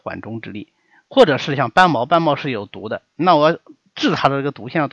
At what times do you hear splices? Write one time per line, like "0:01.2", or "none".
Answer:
none